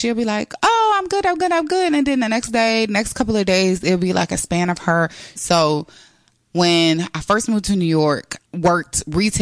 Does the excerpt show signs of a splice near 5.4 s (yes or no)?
yes